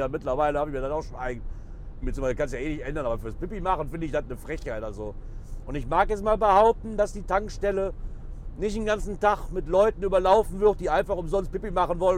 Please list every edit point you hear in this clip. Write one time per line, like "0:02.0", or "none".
0:02.0